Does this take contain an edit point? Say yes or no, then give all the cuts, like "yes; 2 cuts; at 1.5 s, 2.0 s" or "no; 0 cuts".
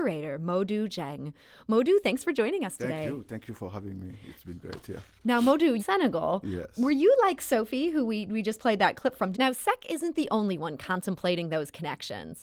yes; 2 cuts; at 5.8 s, 9.3 s